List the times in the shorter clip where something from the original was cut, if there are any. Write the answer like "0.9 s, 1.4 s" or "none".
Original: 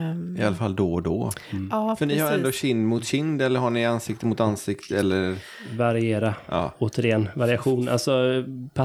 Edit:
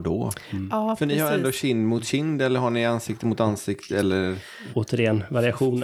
4.7 s